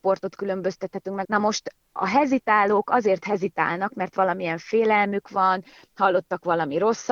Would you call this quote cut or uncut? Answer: cut